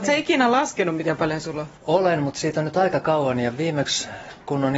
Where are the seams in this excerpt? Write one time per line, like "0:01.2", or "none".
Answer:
0:01.8